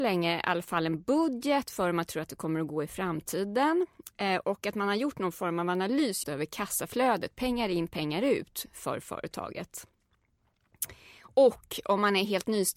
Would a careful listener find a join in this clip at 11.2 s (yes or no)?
no